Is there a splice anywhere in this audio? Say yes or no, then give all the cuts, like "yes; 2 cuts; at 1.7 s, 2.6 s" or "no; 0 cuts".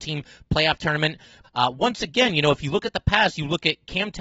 yes; 1 cut; at 1.4 s